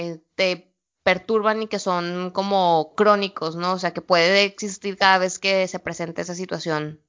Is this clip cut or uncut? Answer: uncut